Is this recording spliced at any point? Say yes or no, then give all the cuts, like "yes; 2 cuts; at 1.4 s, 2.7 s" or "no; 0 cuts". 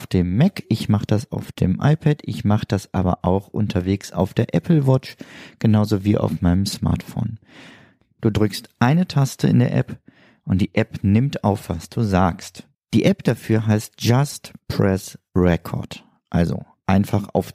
yes; 2 cuts; at 8.2 s, 12.7 s